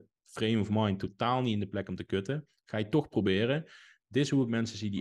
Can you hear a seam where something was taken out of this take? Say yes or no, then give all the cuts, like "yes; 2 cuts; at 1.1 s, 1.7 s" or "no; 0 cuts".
no; 0 cuts